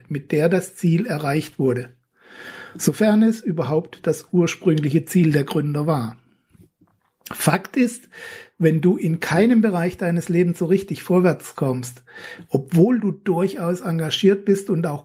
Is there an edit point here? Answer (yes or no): no